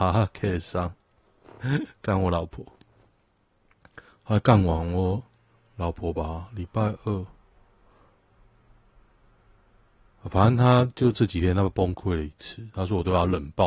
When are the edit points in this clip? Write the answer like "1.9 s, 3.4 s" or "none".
none